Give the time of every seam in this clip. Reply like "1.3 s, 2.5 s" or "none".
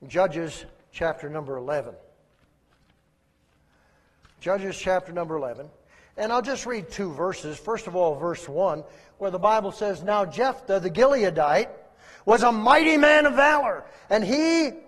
none